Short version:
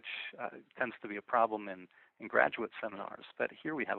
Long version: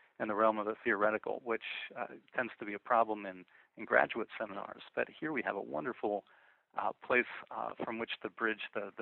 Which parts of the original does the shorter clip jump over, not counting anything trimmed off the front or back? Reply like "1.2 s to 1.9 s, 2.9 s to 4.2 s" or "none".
none